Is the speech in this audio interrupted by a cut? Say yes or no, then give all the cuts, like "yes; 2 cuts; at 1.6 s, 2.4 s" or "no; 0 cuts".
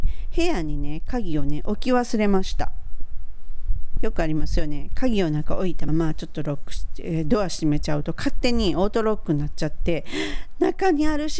yes; 2 cuts; at 4.0 s, 5.9 s